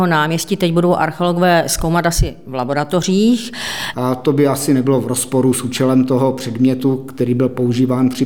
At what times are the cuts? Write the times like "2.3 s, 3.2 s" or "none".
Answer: 3.9 s